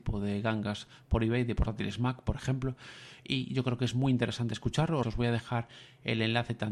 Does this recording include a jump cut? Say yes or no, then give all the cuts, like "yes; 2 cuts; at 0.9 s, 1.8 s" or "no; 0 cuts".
yes; 1 cut; at 5.0 s